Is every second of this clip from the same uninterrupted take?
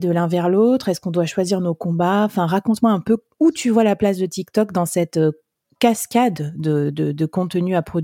yes; 0 cuts

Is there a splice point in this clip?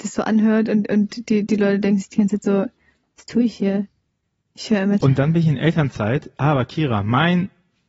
yes; 1 cut; at 5.0 s

